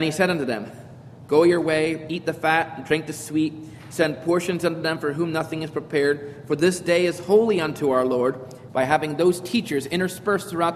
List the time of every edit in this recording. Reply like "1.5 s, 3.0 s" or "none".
8.7 s